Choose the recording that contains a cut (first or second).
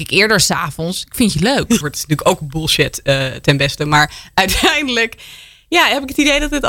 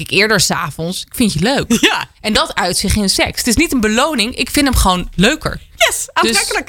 first